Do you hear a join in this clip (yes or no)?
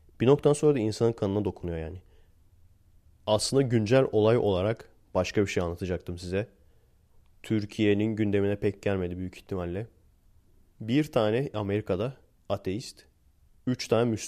no